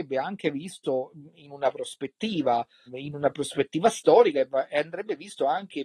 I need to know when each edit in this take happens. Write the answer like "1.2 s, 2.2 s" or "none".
2.9 s